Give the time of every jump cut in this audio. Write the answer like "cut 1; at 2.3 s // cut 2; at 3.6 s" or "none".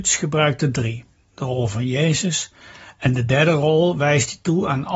cut 1; at 1.3 s